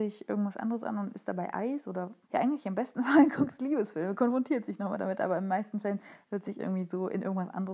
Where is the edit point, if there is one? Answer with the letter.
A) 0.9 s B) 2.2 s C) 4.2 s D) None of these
B